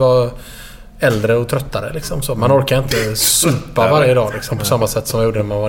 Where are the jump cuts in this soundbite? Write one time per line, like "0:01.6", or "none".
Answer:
none